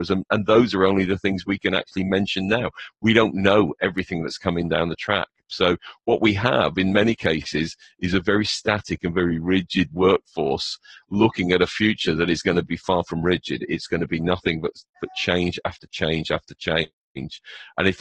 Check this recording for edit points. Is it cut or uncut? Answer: uncut